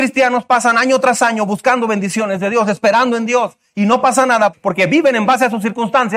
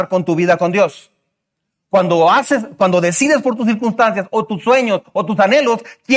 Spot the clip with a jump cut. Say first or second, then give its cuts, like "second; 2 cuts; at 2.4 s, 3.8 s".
first; 1 cut; at 4.5 s